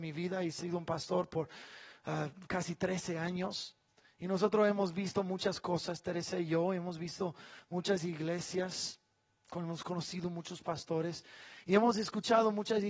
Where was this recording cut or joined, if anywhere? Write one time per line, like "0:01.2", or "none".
none